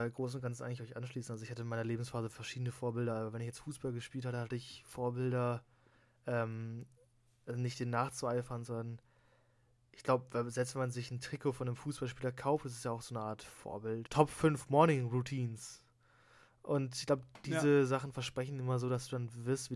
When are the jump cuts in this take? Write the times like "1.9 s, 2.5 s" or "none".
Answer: 14.1 s